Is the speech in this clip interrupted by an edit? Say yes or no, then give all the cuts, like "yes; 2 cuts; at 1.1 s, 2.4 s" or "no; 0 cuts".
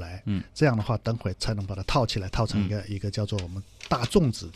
yes; 1 cut; at 1.3 s